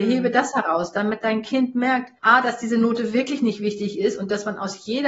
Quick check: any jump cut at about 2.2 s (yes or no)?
yes